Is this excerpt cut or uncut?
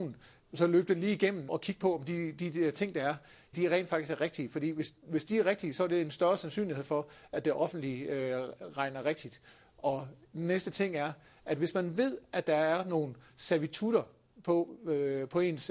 cut